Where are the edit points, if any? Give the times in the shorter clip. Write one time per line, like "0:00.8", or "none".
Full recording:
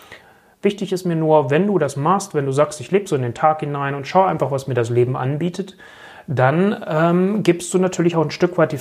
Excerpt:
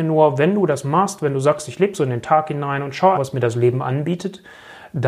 0:03.1